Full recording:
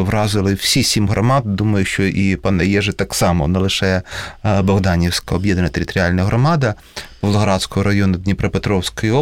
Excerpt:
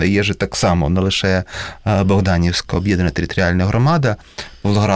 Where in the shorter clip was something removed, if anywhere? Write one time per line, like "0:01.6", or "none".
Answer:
none